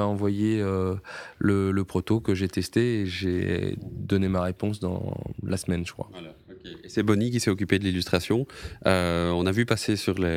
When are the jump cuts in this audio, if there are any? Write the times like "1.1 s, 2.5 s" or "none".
none